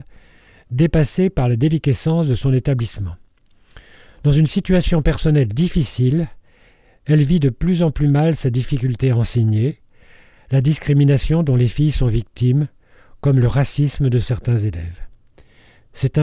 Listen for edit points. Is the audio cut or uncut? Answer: uncut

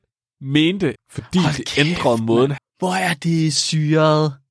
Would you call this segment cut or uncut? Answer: cut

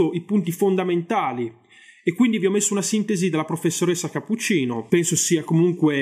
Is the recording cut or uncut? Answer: uncut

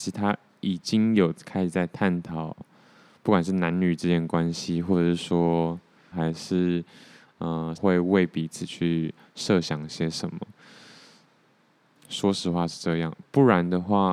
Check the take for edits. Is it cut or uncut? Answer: cut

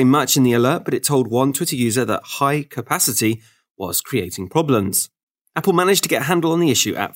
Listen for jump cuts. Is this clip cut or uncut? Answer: uncut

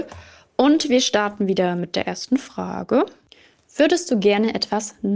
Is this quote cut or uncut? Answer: uncut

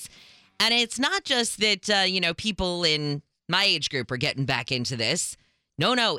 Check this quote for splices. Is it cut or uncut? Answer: uncut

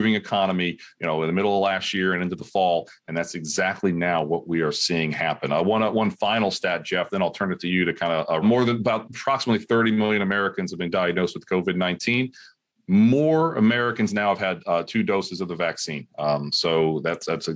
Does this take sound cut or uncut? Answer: cut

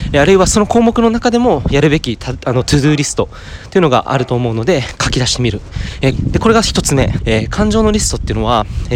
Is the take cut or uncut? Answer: cut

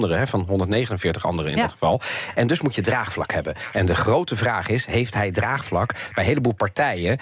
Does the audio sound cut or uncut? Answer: uncut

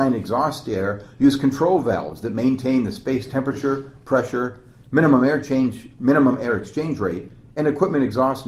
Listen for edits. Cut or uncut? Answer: uncut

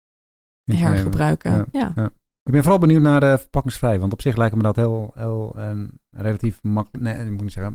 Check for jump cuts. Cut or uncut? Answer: cut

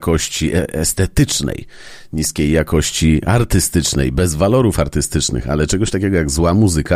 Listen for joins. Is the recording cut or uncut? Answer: uncut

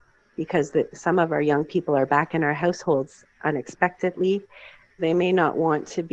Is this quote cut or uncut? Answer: cut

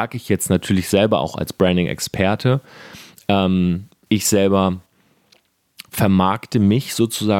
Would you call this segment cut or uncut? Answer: uncut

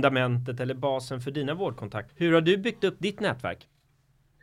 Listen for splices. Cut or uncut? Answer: cut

